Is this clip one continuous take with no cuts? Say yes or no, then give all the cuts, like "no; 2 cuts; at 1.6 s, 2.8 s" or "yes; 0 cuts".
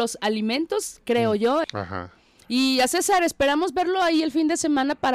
no; 1 cut; at 1.6 s